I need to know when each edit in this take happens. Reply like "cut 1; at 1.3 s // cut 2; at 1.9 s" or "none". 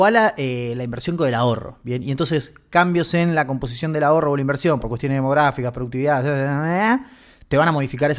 none